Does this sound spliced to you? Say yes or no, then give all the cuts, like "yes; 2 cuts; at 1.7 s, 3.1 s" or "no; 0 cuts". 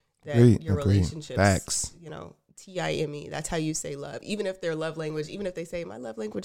no; 0 cuts